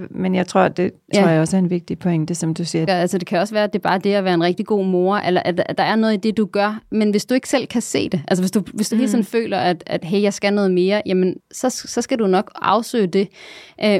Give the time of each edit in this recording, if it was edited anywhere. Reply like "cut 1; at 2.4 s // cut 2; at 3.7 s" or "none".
cut 1; at 1.1 s // cut 2; at 2.9 s // cut 3; at 11.4 s